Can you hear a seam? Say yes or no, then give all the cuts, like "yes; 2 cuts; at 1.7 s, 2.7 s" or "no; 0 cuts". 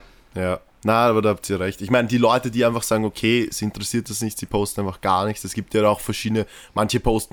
no; 0 cuts